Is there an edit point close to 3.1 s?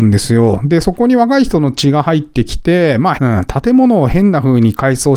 yes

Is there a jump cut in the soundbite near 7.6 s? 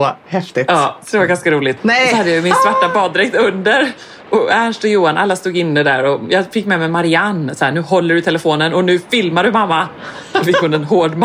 no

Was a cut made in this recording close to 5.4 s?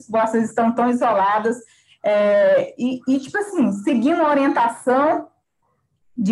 no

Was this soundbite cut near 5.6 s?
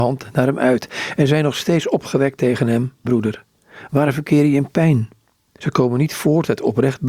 yes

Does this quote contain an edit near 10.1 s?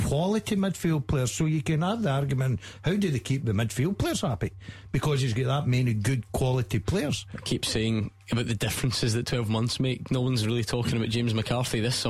no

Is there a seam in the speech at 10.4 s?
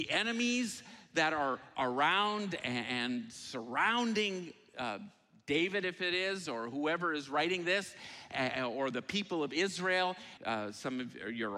yes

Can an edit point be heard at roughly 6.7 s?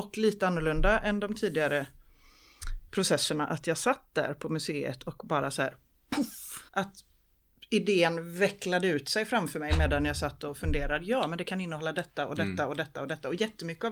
yes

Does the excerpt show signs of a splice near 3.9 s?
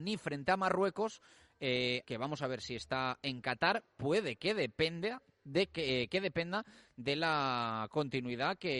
no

